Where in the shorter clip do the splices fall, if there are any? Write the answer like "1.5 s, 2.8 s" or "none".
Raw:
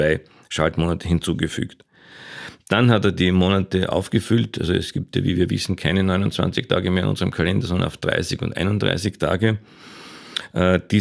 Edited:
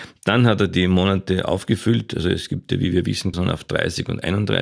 3.3 s